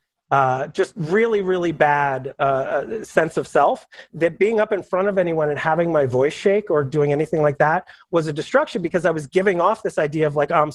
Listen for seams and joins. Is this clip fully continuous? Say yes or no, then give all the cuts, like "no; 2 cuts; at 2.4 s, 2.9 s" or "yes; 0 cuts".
yes; 0 cuts